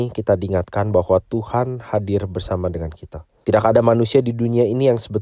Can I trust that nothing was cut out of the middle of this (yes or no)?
no